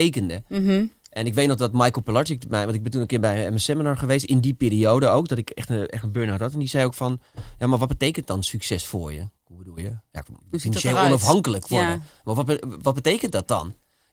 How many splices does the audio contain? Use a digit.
1